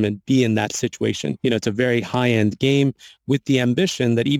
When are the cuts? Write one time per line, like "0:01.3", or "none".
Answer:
0:01.4